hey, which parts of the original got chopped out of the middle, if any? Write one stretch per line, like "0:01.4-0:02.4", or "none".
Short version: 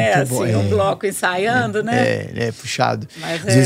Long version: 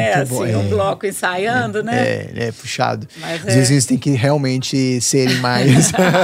none

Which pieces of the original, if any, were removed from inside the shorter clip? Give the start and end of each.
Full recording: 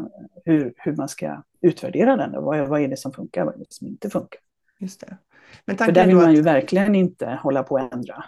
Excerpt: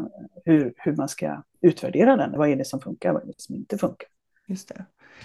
0:02.4-0:02.7

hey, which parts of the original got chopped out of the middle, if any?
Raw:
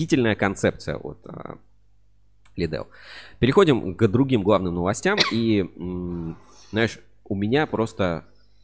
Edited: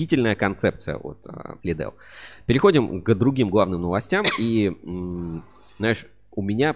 0:01.6-0:02.5

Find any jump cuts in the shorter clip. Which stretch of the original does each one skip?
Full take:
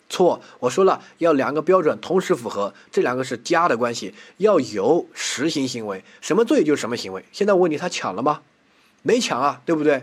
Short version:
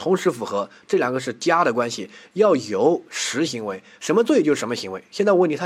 0:05.5-0:05.7

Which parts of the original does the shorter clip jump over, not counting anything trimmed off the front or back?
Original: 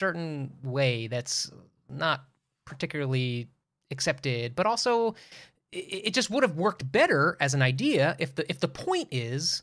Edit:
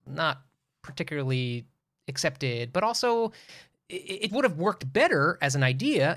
0:06.1-0:06.3

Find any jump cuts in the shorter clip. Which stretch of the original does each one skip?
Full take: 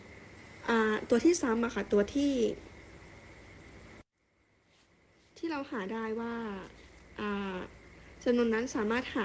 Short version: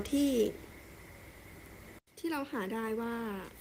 0:04.1-0:05.3

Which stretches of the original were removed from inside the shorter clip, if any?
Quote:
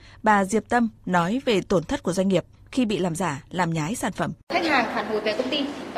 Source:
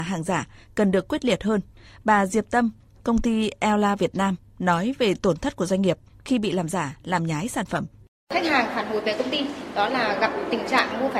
0:02.8-0:04.5
0:07.9-0:08.2

